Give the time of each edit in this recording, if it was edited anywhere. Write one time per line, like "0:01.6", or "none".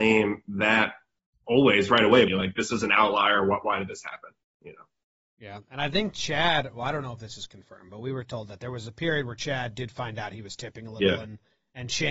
0:02.3